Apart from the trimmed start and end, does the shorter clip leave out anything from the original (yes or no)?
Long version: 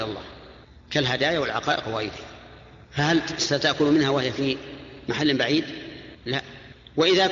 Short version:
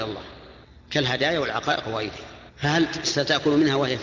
yes